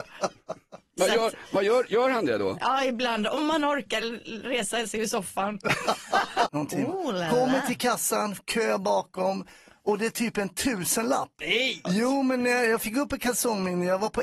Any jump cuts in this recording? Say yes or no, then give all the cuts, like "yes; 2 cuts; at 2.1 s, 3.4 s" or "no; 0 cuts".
yes; 2 cuts; at 6.5 s, 11.8 s